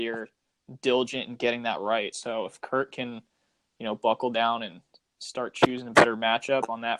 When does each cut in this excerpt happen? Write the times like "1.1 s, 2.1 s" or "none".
none